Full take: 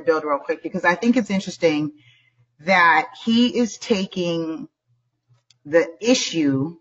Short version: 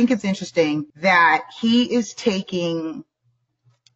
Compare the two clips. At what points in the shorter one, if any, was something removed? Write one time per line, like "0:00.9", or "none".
0:00.9